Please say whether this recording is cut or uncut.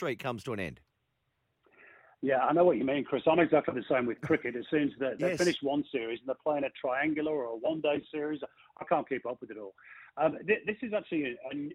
uncut